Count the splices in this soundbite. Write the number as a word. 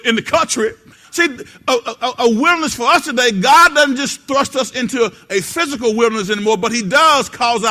one